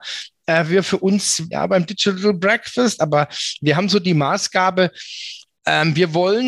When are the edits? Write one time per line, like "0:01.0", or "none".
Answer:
0:01.5